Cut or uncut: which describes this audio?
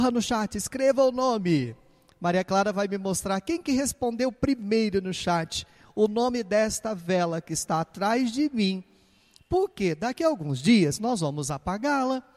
uncut